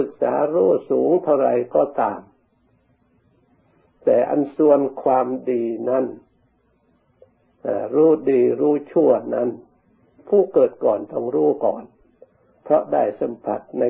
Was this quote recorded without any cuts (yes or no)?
yes